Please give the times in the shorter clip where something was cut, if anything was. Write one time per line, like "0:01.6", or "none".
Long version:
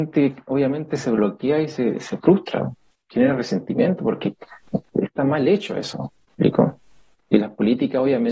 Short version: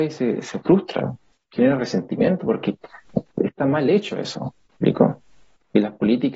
none

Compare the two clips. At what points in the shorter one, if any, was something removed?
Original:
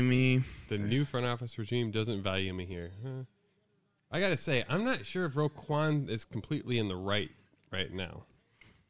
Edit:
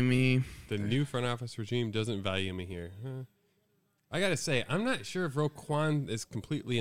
none

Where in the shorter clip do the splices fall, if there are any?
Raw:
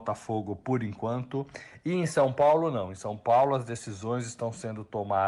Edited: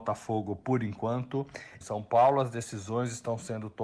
0:01.8

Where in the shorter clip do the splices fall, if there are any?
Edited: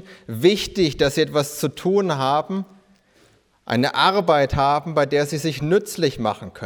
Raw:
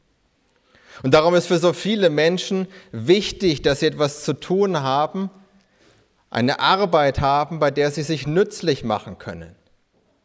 none

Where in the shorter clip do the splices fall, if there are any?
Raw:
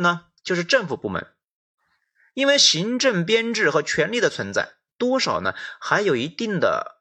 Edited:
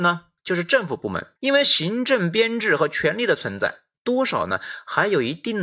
0:01.4

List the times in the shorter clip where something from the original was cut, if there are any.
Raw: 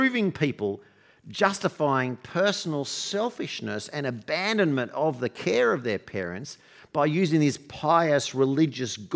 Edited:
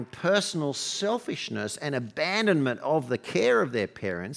none

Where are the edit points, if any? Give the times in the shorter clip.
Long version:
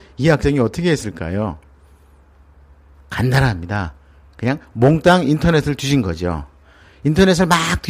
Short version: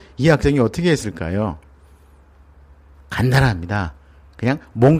none

